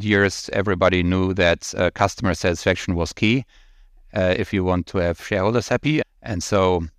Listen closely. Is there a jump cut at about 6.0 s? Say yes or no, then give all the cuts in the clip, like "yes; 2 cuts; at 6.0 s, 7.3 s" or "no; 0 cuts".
yes; 1 cut; at 6.0 s